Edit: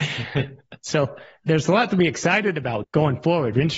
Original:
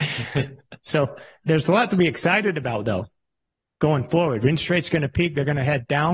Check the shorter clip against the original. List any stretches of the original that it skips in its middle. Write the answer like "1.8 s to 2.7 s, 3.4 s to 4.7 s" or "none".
2.8 s to 3.7 s